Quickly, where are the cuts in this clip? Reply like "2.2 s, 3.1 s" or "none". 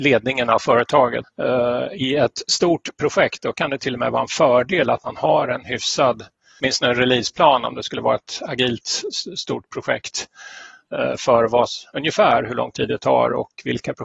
1.2 s